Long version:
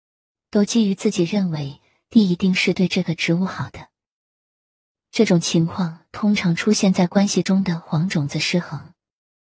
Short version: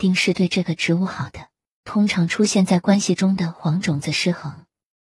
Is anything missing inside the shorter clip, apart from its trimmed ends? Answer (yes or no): yes